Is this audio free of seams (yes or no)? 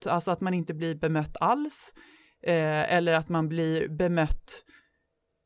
yes